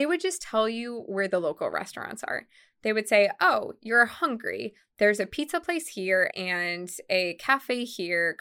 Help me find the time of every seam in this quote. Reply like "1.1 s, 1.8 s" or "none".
6.3 s